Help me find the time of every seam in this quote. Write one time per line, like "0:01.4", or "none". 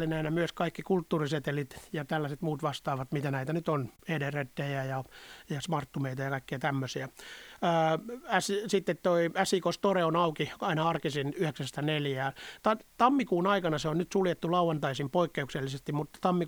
none